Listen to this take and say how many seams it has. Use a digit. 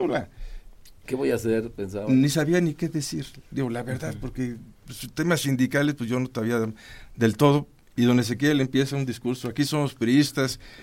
1